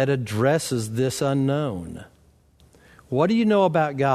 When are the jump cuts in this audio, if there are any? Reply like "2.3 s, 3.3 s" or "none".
none